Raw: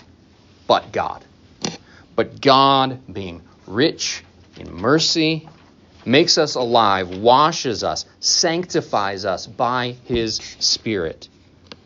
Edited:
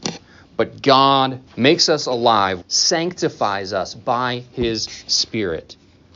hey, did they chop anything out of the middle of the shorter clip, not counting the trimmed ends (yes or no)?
yes